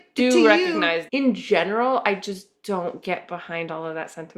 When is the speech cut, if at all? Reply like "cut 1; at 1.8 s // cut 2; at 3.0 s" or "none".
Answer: cut 1; at 1.1 s